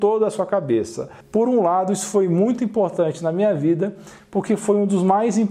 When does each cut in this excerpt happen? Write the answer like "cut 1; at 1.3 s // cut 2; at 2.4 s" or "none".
cut 1; at 1.2 s

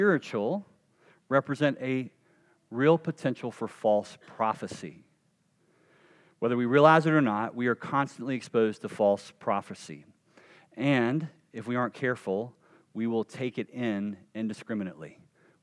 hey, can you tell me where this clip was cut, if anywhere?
none

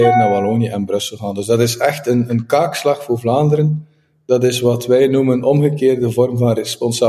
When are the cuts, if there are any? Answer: none

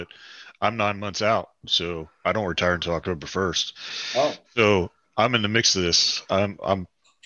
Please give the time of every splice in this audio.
cut 1; at 4.5 s

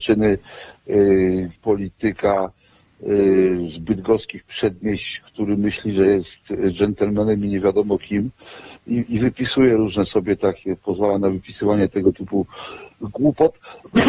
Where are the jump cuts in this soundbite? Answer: cut 1; at 1.6 s

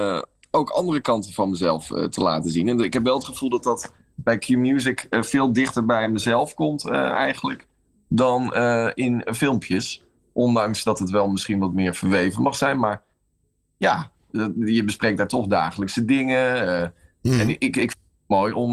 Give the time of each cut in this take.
none

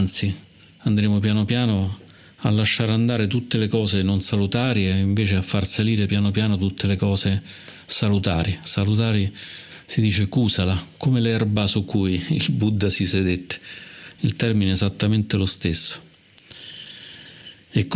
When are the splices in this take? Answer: none

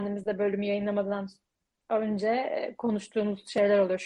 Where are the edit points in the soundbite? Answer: none

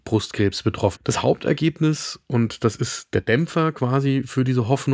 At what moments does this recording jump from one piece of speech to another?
cut 1; at 1.0 s

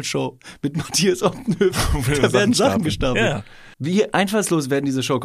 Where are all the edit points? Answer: cut 1; at 3.7 s

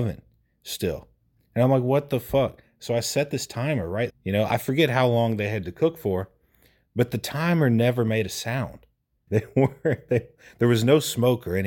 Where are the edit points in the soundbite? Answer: cut 1; at 4.1 s // cut 2; at 9.3 s

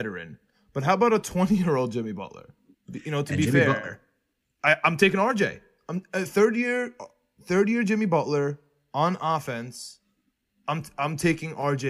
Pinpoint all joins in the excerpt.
cut 1; at 2.7 s

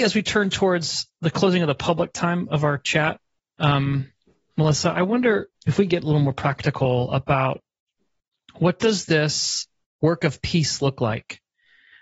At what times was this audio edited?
cut 1; at 5.5 s

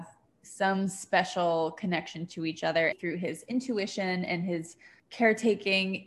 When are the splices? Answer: cut 1; at 2.9 s

